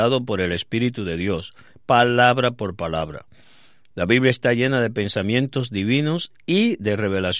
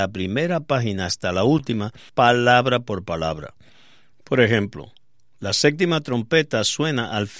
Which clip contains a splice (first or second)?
second